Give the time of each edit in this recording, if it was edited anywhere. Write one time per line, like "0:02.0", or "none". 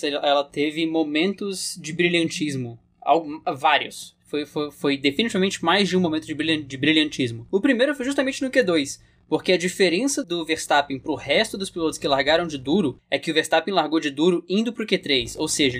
0:10.2